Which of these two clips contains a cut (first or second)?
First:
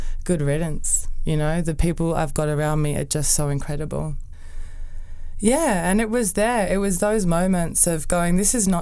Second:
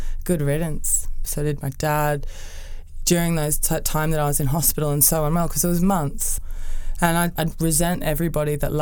second